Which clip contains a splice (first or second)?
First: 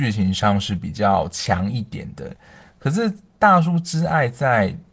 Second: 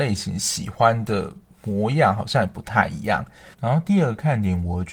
second